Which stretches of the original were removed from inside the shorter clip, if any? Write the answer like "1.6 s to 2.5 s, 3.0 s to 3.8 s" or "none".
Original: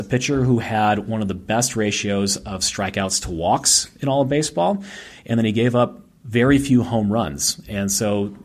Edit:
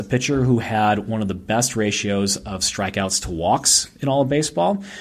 none